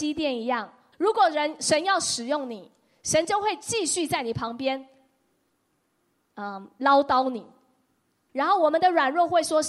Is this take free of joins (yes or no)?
no